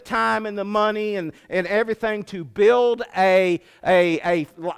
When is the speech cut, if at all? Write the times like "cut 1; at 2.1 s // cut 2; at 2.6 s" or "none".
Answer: none